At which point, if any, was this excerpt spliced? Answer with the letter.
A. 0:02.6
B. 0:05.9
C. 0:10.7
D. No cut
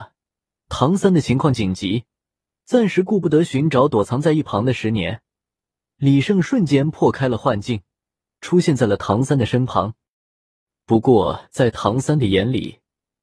D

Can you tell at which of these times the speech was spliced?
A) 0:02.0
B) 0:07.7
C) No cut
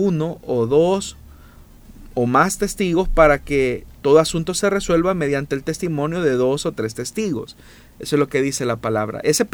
C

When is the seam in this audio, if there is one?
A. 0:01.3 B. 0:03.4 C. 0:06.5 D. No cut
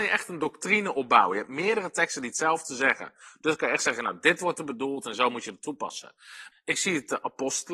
C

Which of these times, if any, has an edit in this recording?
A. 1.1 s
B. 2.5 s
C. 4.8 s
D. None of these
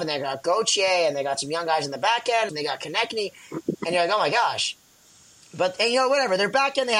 B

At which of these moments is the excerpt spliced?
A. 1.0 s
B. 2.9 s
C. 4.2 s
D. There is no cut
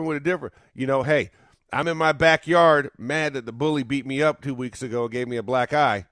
D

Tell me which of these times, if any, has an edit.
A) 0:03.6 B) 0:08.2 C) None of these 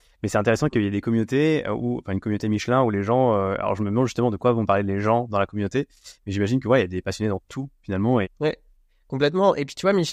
B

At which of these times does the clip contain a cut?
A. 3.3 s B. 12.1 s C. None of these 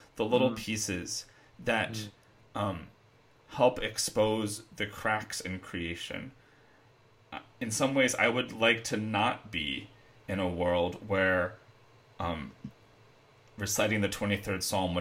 A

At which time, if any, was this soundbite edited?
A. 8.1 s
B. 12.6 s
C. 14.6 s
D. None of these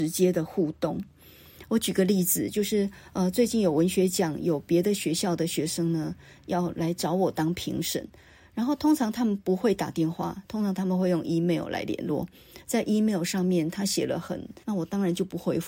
C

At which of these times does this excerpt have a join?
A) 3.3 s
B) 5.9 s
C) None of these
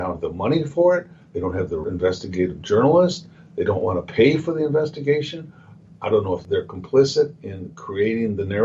C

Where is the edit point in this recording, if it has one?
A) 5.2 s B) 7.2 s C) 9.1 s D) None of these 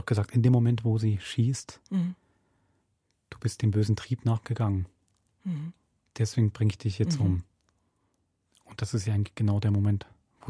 D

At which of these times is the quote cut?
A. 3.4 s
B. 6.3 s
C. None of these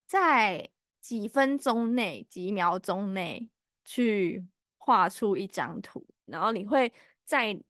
B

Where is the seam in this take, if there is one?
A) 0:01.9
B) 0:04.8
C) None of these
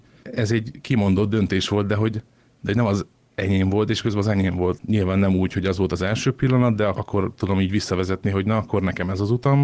B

